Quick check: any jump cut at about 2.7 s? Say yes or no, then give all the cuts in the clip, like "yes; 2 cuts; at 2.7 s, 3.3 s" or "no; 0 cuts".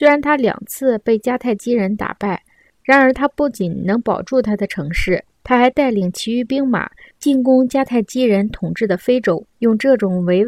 yes; 2 cuts; at 2.7 s, 5.3 s